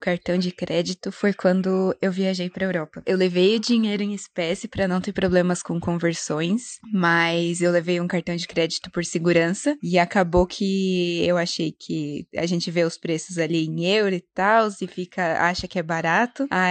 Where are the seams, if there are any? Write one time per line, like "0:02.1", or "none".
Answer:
none